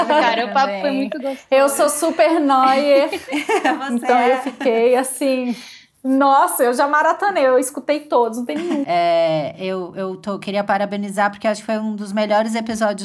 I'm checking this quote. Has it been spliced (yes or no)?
yes